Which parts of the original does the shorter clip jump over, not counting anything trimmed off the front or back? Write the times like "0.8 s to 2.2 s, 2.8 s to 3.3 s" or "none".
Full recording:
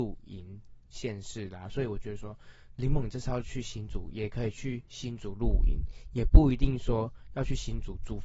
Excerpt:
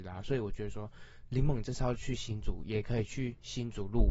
none